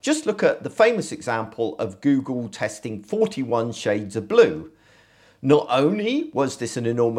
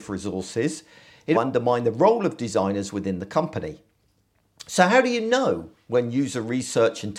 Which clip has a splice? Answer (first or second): second